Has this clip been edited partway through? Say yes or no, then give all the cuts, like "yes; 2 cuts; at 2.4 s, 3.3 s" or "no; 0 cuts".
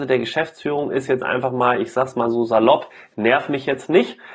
no; 0 cuts